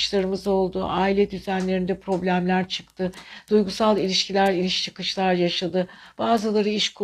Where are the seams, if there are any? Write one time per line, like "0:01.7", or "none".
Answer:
none